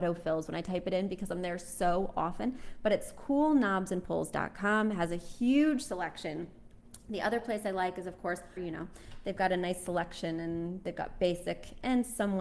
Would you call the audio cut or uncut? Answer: cut